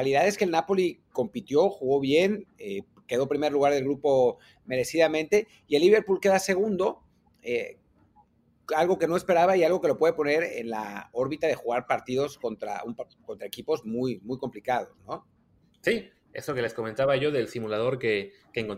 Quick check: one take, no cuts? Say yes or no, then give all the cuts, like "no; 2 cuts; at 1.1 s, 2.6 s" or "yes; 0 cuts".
yes; 0 cuts